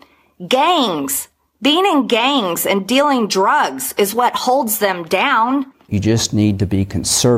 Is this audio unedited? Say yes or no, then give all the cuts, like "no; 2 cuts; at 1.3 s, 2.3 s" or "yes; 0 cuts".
no; 1 cut; at 5.9 s